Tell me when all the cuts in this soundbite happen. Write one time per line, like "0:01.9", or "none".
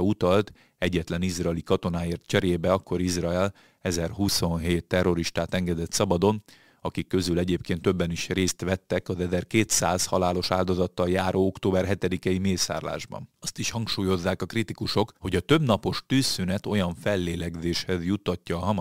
0:13.4
0:15.2